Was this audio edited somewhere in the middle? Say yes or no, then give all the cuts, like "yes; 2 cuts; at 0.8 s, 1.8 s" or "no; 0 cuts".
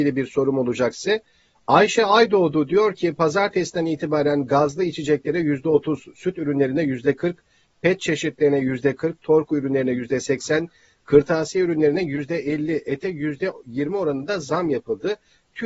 yes; 1 cut; at 9.2 s